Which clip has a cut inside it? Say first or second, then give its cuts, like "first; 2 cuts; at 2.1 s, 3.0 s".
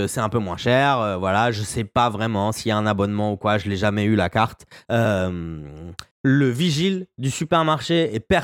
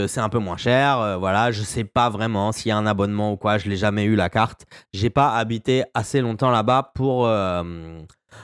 first; 2 cuts; at 4.9 s, 6.1 s